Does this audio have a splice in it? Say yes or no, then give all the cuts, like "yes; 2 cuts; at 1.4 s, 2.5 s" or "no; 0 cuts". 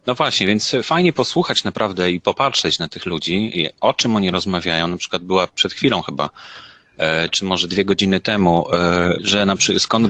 yes; 2 cuts; at 5.5 s, 9.1 s